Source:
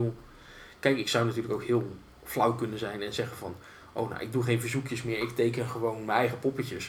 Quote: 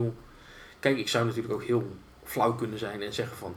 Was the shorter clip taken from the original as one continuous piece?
yes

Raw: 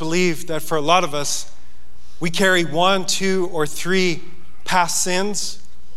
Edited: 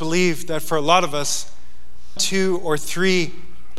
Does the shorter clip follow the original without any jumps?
no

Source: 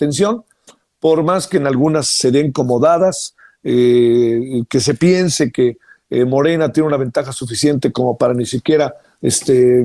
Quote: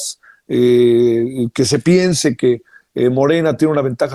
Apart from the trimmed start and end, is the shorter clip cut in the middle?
no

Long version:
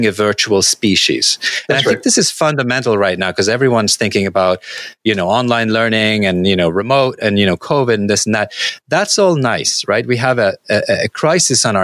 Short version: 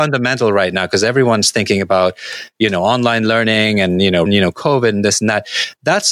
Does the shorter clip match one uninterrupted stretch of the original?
no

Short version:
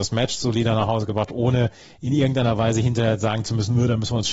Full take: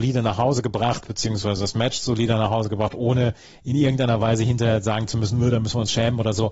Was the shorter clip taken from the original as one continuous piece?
yes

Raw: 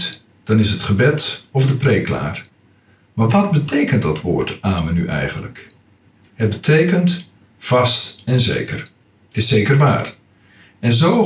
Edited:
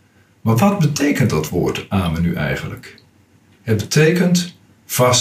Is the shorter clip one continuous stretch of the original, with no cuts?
yes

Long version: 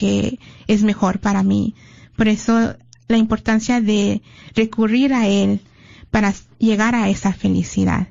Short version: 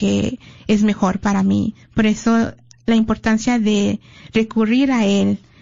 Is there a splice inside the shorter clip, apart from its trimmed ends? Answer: yes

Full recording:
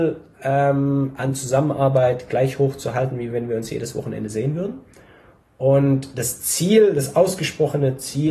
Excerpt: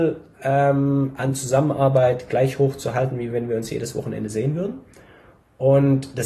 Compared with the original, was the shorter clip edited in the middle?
no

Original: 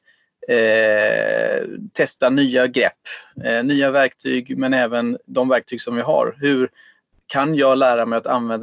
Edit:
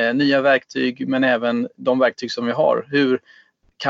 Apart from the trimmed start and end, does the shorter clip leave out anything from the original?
no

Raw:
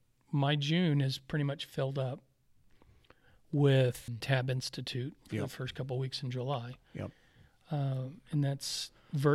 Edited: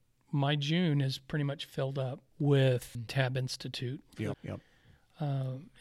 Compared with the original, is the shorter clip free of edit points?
no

